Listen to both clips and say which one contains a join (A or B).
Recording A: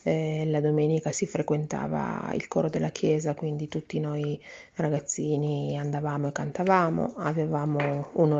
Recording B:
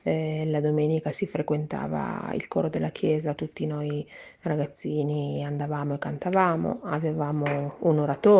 B